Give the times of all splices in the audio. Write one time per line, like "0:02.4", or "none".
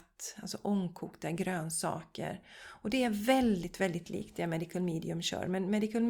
none